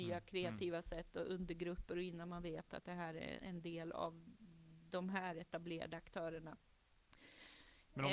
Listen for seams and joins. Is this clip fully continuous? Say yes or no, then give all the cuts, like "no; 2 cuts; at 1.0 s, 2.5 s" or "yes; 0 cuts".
no; 1 cut; at 3.4 s